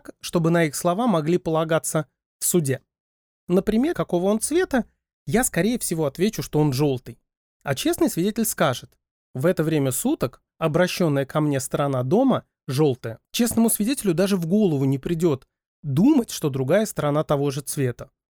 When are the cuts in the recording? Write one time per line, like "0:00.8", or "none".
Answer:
0:03.9
0:10.5
0:13.2